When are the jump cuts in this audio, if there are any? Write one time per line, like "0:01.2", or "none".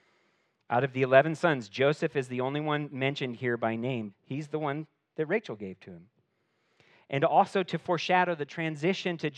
0:04.1